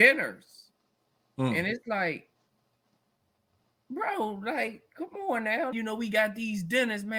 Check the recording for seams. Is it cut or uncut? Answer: cut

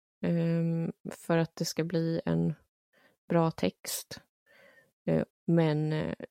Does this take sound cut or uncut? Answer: cut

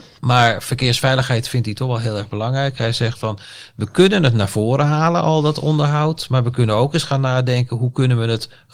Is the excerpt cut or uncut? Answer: uncut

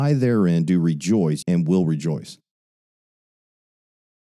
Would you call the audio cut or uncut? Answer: cut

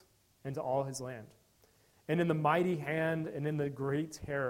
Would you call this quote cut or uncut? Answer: uncut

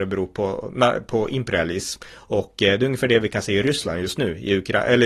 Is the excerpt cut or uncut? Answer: uncut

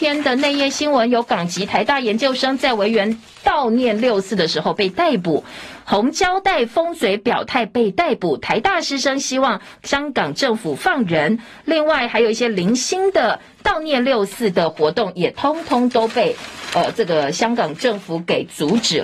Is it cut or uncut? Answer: uncut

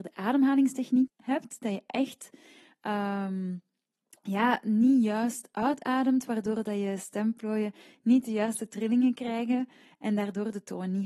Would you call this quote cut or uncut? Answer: cut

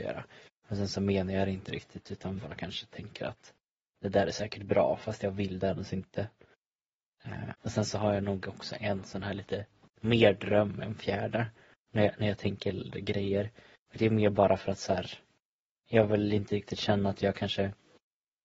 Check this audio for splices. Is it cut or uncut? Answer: cut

